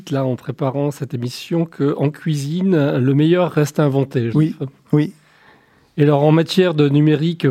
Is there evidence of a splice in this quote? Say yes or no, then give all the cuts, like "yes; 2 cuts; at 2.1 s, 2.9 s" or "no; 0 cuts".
yes; 1 cut; at 4.3 s